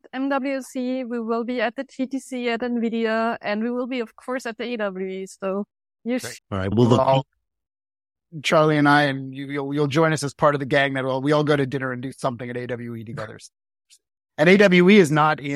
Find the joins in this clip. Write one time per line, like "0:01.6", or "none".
0:06.3